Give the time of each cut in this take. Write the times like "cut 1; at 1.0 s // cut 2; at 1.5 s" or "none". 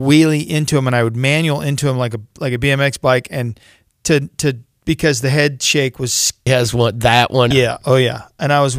cut 1; at 6.5 s // cut 2; at 7.5 s